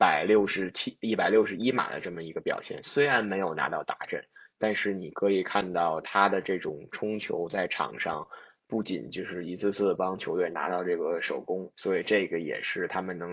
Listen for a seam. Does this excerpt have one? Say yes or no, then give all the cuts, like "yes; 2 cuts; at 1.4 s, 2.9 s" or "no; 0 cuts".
yes; 1 cut; at 11.7 s